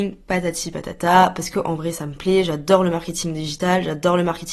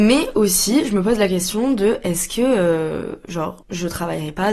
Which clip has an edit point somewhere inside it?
second; 1 cut; at 3.6 s

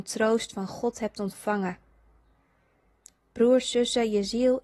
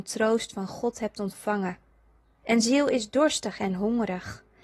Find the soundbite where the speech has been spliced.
second; 1 cut; at 2.4 s

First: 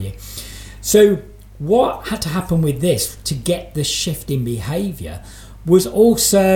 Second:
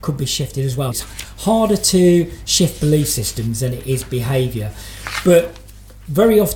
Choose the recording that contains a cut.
second; 1 cut; at 0.9 s

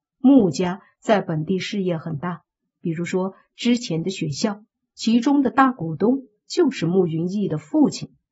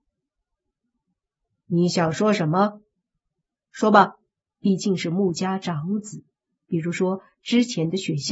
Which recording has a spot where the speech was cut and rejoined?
second; 2 cuts; at 4.4 s, 6.5 s

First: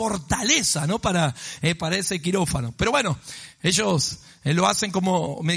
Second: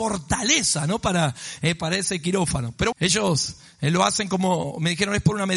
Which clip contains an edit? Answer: second; 1 cut; at 2.9 s

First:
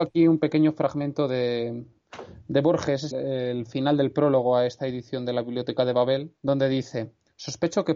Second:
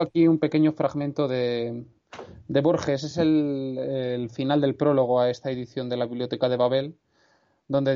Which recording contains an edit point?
first; 2 cuts; at 3.1 s, 6.4 s

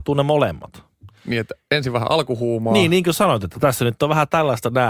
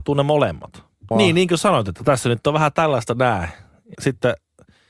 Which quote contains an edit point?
second; 2 cuts; at 1.1 s, 3.9 s

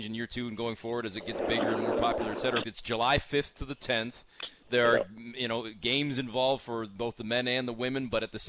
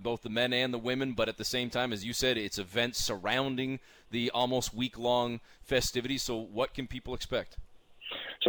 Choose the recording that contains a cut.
first; 1 cut; at 2.6 s

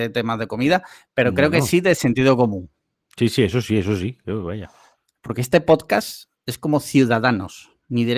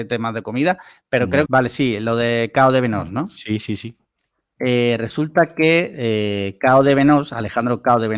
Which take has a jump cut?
second; 2 cuts; at 1.5 s, 4.6 s

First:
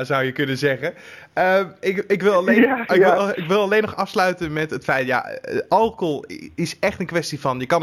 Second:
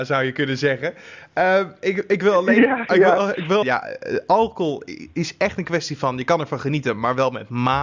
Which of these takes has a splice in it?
second; 1 cut; at 3.6 s

